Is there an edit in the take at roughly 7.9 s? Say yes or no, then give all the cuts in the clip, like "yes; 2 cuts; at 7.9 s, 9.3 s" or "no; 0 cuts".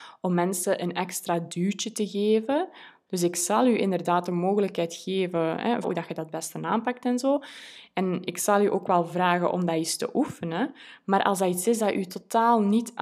no; 2 cuts; at 3.1 s, 5.8 s